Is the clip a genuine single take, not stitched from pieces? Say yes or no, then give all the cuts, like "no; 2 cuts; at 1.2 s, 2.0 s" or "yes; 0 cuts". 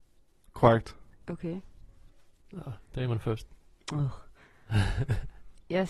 no; 1 cut; at 2.3 s